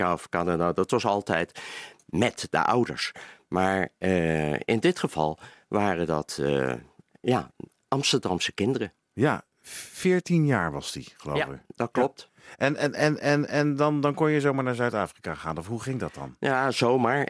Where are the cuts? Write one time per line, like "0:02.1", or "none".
none